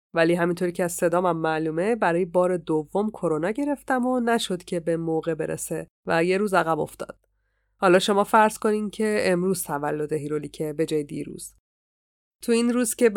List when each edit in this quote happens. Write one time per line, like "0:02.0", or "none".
none